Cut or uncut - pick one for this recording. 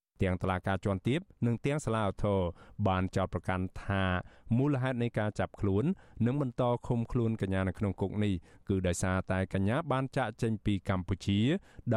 uncut